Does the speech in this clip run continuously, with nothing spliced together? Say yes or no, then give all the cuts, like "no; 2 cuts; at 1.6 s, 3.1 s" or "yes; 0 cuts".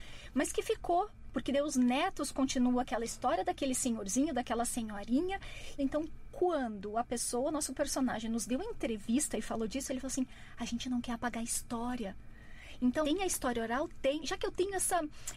no; 3 cuts; at 5.8 s, 13.0 s, 14.2 s